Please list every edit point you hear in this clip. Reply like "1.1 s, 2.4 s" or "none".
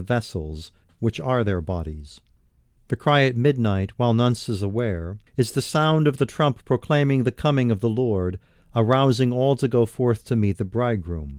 2.8 s, 5.3 s